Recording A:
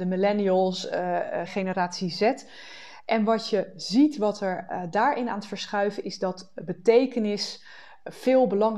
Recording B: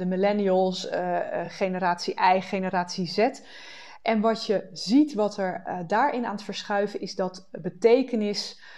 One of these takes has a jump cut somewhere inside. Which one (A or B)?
A